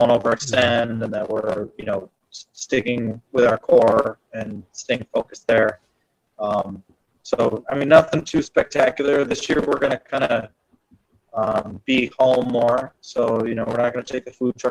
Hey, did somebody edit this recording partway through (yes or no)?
no